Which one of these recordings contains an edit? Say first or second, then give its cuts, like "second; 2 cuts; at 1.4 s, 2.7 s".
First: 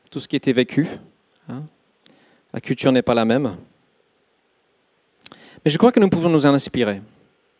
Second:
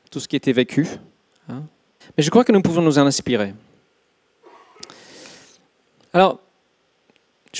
second; 1 cut; at 2.0 s